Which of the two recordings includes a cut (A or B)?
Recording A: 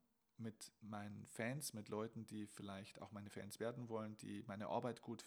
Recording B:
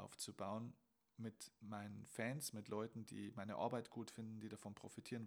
B